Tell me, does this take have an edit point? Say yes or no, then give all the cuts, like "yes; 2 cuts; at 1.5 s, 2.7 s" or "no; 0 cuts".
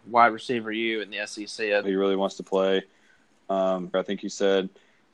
yes; 2 cuts; at 1.8 s, 3.9 s